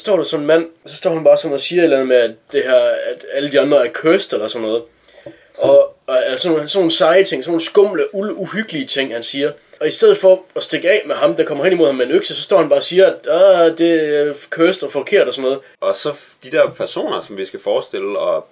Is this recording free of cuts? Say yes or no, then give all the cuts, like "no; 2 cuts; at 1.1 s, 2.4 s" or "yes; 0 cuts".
no; 1 cut; at 15.8 s